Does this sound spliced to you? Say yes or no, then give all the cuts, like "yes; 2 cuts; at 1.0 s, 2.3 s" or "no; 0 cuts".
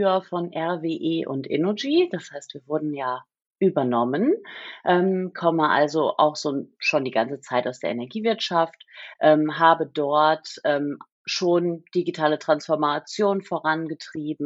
no; 0 cuts